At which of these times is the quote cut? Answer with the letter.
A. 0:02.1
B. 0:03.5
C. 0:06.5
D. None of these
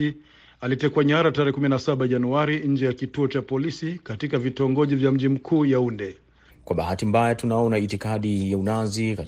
C